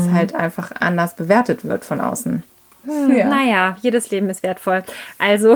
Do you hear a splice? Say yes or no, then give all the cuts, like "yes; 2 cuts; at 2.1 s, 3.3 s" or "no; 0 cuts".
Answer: yes; 1 cut; at 2.8 s